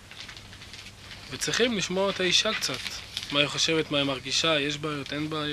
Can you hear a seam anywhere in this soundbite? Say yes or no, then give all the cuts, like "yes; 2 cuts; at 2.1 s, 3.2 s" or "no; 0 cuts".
no; 0 cuts